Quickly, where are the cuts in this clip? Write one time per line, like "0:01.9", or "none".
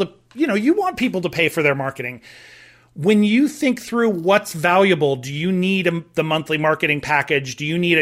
none